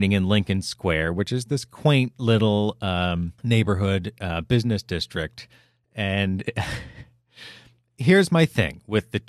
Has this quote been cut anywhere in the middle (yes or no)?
yes